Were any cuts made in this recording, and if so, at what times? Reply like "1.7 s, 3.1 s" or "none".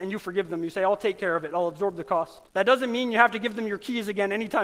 2.5 s